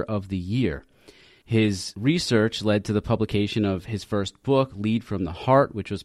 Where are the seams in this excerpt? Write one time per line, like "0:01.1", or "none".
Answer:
none